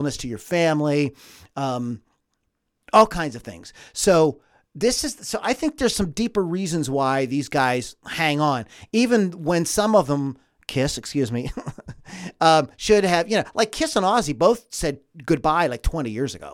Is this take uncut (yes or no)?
yes